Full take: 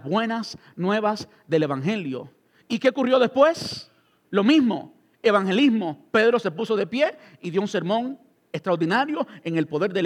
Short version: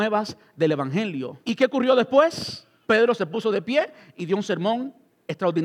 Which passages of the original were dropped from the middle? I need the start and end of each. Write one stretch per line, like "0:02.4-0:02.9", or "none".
0:02.3-0:02.7
0:04.1-0:06.1